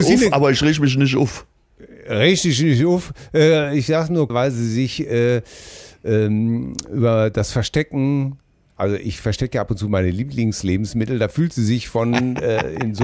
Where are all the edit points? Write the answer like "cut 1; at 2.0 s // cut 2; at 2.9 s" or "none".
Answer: cut 1; at 4.3 s